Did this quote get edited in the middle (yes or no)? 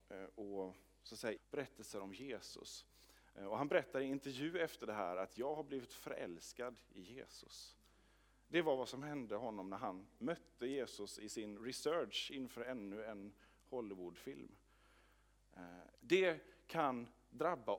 yes